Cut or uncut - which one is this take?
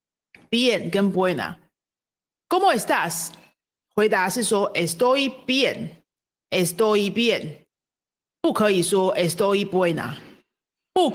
uncut